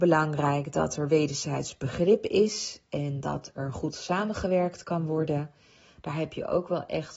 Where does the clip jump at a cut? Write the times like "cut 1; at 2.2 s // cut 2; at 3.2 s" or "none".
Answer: none